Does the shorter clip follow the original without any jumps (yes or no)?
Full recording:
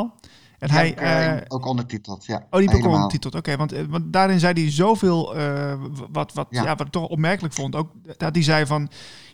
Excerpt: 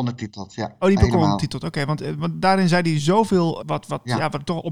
no